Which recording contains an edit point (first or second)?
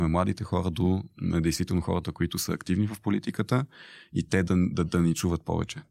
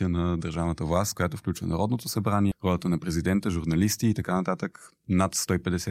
second